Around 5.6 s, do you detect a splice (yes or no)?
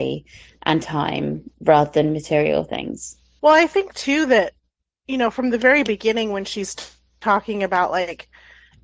no